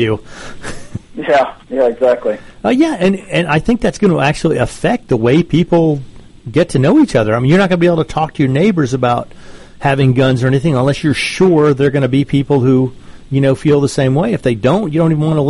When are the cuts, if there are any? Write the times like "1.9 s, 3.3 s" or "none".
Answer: none

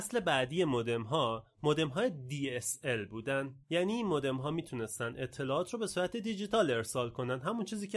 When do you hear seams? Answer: 3.6 s

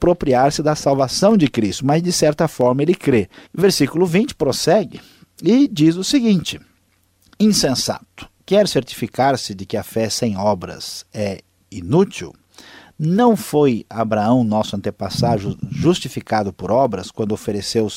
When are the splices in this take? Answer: 3.5 s

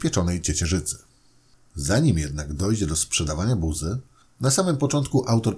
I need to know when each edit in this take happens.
none

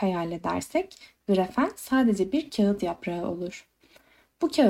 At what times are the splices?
none

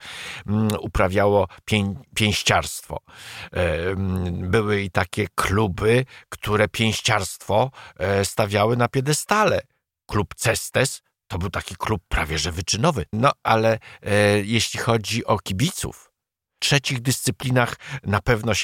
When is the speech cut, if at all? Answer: 13.1 s, 16.6 s

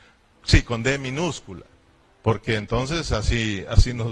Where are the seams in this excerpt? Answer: 2.0 s

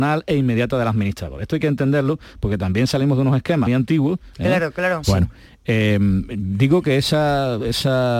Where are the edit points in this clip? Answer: 3.7 s, 5.0 s

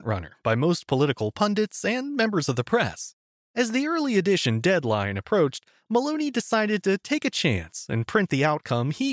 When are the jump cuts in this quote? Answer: 3.4 s

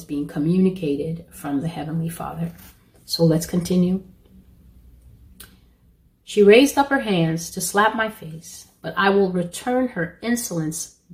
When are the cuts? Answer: none

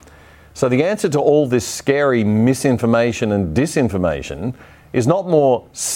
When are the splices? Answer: none

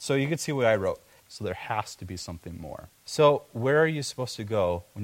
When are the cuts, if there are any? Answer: 1.2 s, 3.0 s

